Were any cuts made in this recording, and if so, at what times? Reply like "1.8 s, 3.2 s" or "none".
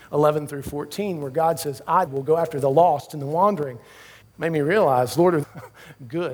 2.1 s, 4.2 s, 5.4 s